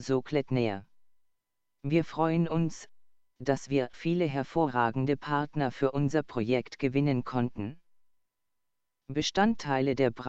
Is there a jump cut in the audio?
yes; 1 cut; at 3.9 s

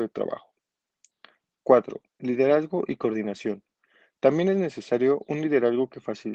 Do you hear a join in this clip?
no; 0 cuts

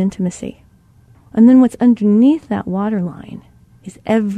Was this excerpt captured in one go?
no; 1 cut; at 1.1 s

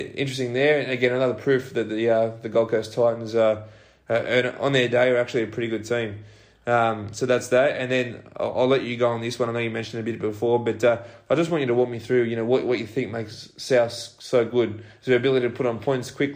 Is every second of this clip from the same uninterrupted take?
yes; 0 cuts

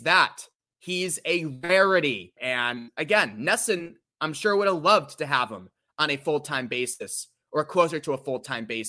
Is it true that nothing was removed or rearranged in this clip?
no; 1 cut; at 2.4 s

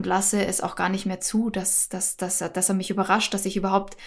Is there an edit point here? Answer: no; 0 cuts

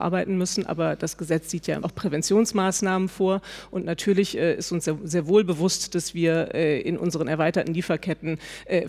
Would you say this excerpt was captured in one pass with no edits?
no; 1 cut; at 1.8 s

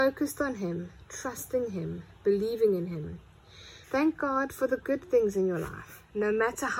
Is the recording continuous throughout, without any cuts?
no; 1 cut; at 3.8 s

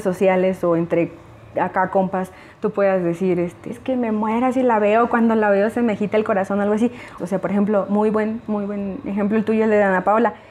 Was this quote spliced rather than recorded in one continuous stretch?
yes; 2 cuts; at 3.7 s, 7.2 s

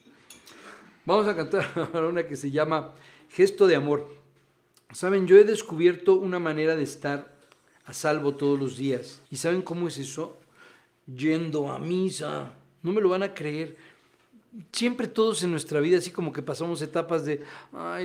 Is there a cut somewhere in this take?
yes; 1 cut; at 9.3 s

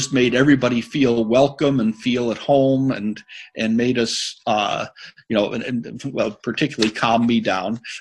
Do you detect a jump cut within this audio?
no; 0 cuts

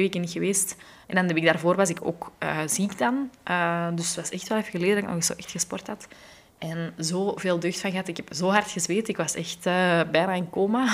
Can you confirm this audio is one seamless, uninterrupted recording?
yes; 0 cuts

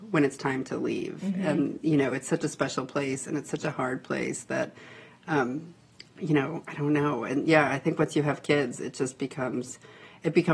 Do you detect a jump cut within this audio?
no; 0 cuts

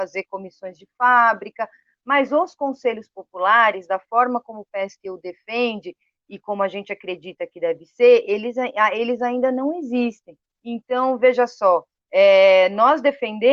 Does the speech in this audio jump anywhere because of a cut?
yes; 1 cut; at 10.6 s

